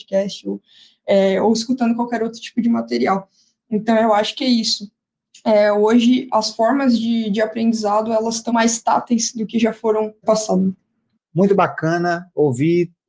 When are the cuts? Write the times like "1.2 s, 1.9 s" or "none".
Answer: 8.5 s, 11.1 s